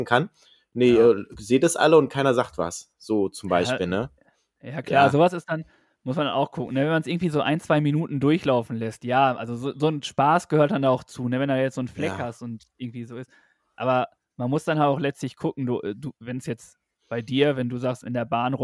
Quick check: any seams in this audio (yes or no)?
no